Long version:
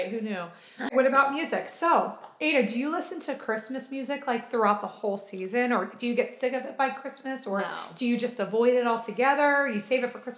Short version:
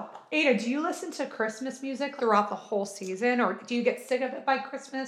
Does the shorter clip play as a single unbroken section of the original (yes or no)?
no